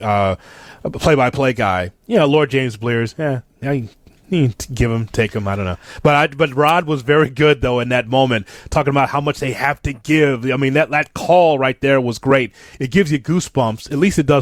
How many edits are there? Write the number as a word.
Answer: zero